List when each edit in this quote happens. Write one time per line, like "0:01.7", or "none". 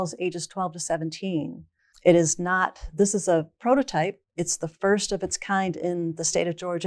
0:01.9